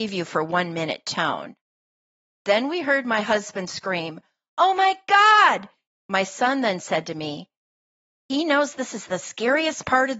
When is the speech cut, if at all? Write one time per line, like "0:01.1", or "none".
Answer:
0:05.9